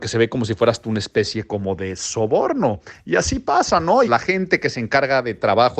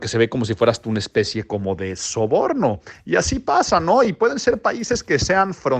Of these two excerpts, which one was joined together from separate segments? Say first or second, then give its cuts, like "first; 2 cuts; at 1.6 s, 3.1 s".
first; 1 cut; at 4.0 s